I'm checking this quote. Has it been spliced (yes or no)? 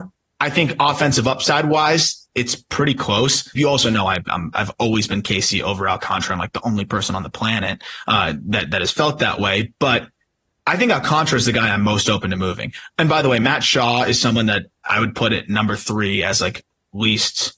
yes